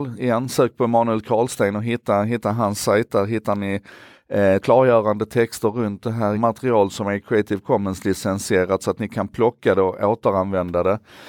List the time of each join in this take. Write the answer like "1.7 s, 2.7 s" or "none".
4.6 s, 6.3 s